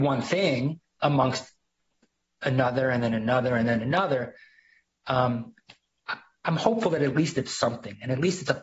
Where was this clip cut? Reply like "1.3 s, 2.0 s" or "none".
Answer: none